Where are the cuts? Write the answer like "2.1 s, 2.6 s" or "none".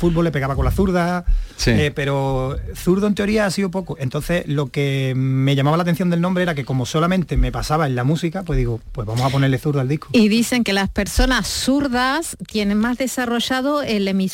none